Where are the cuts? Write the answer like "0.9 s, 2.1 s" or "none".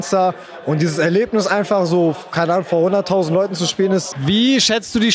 4.1 s